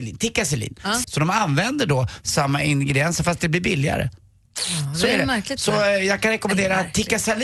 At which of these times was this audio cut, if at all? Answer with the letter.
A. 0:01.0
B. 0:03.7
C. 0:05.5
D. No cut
A